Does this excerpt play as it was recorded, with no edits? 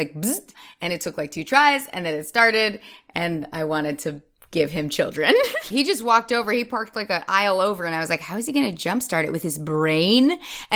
no; 1 cut; at 5.7 s

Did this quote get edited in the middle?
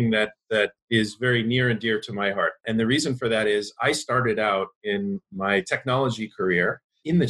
no; 0 cuts

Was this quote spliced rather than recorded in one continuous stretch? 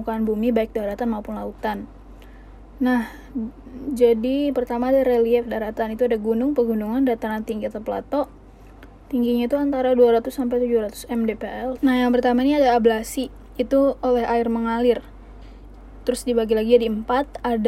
yes; 1 cut; at 11.8 s

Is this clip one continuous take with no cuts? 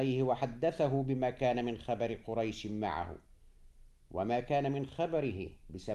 yes; 0 cuts

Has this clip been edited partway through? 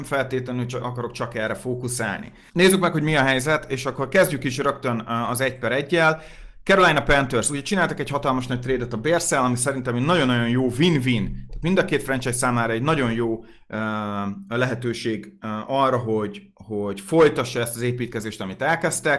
yes; 1 cut; at 2.5 s

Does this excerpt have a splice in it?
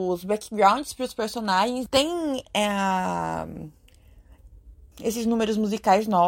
yes; 2 cuts; at 1.9 s, 4.9 s

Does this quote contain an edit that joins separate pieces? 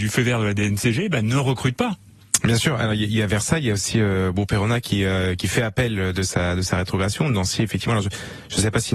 no; 0 cuts

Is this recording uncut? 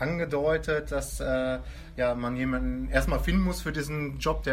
yes; 0 cuts

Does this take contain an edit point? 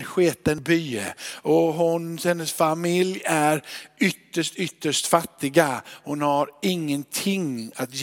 no; 0 cuts

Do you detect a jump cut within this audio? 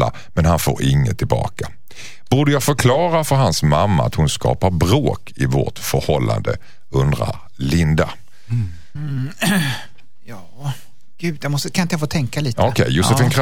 yes; 1 cut; at 9.0 s

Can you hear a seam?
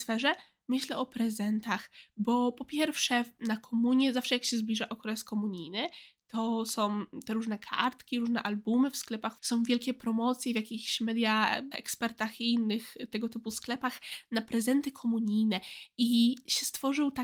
yes; 2 cuts; at 9.4 s, 11.7 s

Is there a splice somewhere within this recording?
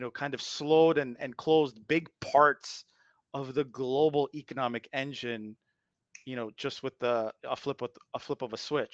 no; 0 cuts

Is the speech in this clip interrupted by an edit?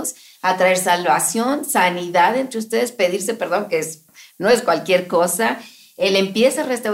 no; 0 cuts

